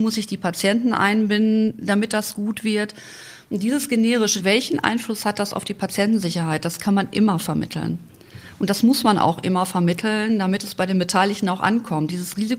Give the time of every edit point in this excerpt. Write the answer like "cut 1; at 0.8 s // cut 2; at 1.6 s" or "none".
cut 1; at 4.4 s

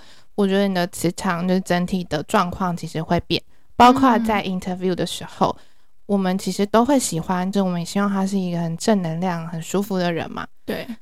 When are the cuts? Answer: cut 1; at 7.5 s

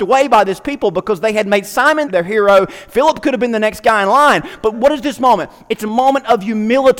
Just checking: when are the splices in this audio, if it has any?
cut 1; at 2.0 s // cut 2; at 4.7 s

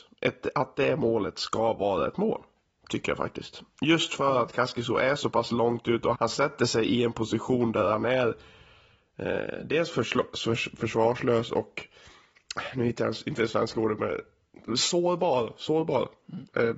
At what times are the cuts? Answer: cut 1; at 6.1 s

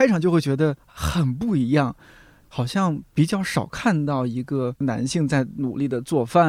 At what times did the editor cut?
none

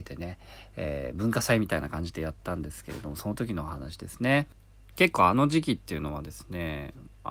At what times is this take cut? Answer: none

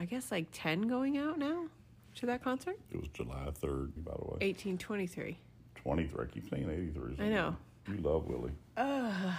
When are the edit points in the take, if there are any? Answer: cut 1; at 4.0 s // cut 2; at 7.9 s

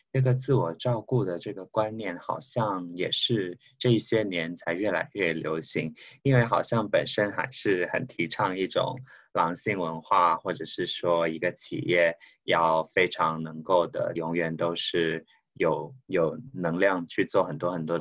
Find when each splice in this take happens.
cut 1; at 14.2 s // cut 2; at 16.0 s

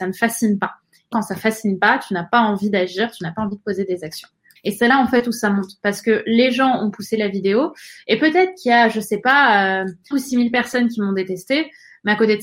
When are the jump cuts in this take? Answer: cut 1; at 1.1 s // cut 2; at 4.6 s // cut 3; at 10.1 s

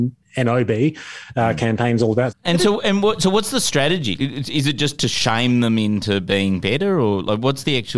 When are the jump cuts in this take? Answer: cut 1; at 2.3 s // cut 2; at 4.2 s

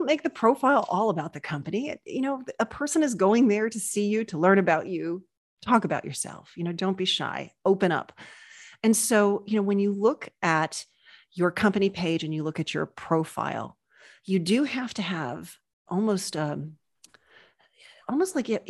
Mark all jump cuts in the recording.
none

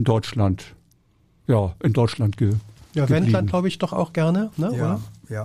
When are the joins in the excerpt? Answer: none

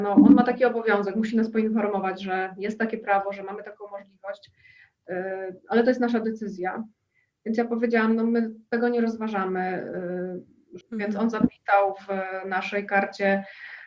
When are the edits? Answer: cut 1; at 10.8 s

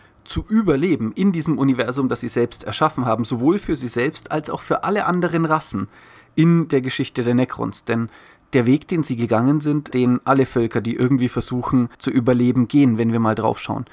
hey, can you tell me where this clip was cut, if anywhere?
cut 1; at 9.9 s // cut 2; at 11.9 s

